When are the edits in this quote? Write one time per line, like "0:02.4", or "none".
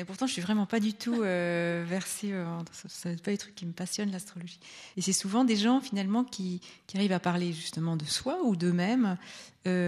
0:04.9